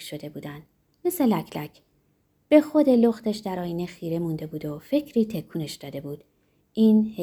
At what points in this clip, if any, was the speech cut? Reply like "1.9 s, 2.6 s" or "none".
none